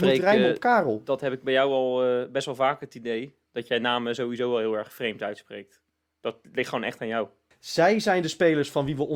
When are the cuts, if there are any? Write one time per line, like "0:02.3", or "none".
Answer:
0:07.5